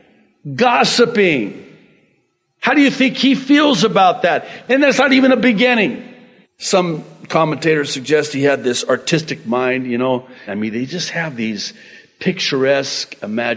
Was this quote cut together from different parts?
yes; 3 cuts; at 4.7 s, 6.4 s, 10.5 s

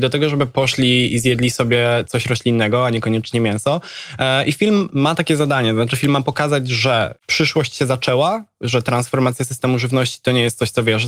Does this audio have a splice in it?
yes; 1 cut; at 7.2 s

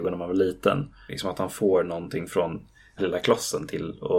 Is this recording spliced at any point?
yes; 2 cuts; at 1.1 s, 3.0 s

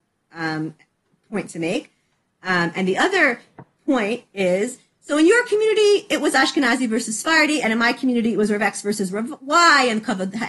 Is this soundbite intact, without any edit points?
yes; 0 cuts

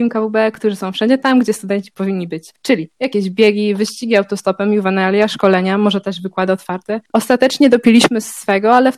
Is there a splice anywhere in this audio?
no; 0 cuts

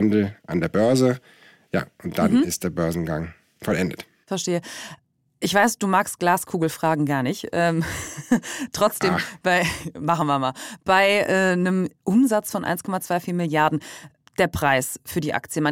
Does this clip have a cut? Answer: no; 0 cuts

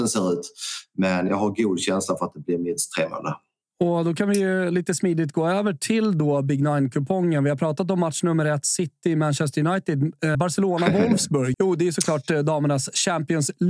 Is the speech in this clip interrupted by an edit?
yes; 2 cuts; at 10.3 s, 11.5 s

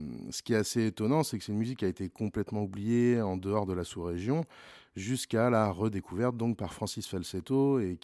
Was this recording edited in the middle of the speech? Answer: no; 0 cuts

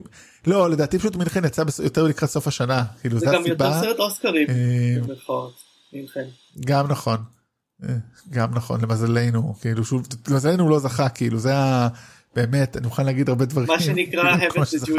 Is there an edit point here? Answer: no; 0 cuts

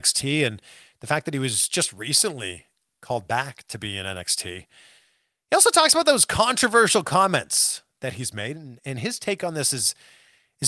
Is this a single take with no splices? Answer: yes; 0 cuts

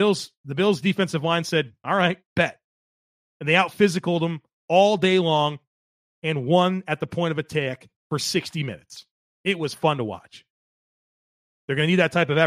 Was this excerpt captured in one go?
yes; 0 cuts

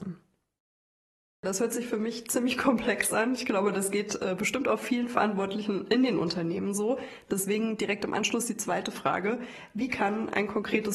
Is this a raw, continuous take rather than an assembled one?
yes; 0 cuts

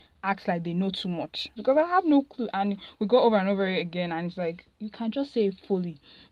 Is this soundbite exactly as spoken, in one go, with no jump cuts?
no; 1 cut; at 1.6 s

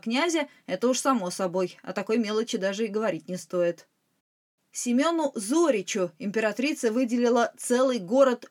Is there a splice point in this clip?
no; 0 cuts

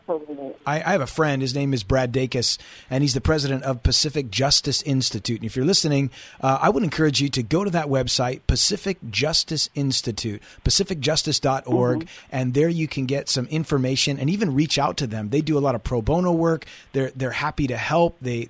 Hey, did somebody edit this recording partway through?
no; 0 cuts

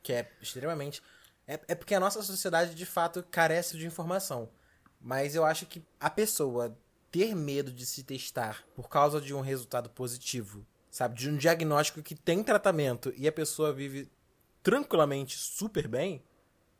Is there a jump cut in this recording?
yes; 1 cut; at 3.7 s

